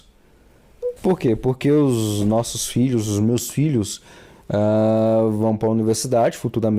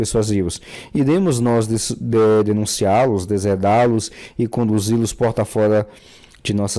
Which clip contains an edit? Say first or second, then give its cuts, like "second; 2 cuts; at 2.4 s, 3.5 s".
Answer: first; 1 cut; at 1.0 s